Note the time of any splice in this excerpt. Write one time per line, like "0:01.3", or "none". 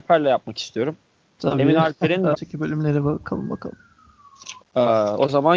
0:02.3
0:04.6